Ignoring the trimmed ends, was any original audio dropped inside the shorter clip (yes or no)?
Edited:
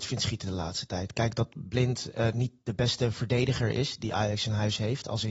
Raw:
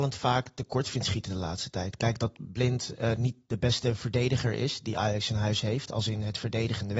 no